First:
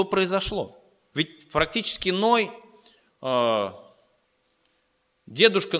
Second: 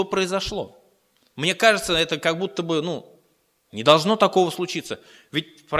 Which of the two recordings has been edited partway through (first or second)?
first